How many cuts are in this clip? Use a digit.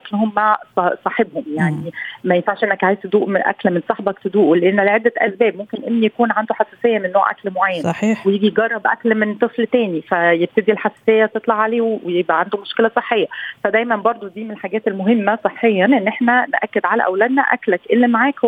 0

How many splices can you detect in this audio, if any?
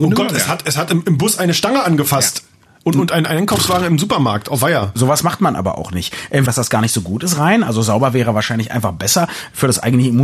1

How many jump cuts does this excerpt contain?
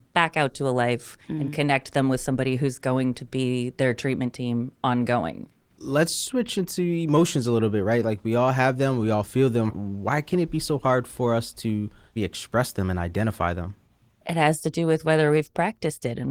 1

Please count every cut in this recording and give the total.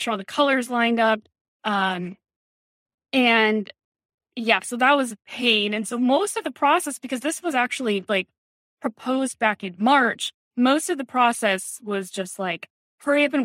0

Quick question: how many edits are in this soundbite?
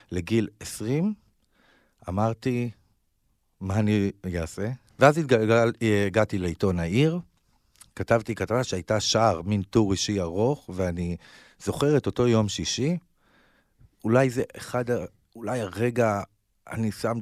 1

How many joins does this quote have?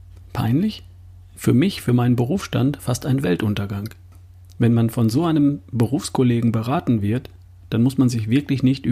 0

